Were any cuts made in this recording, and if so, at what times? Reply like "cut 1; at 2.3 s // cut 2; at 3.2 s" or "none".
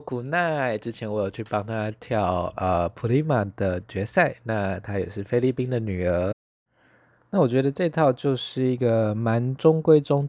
none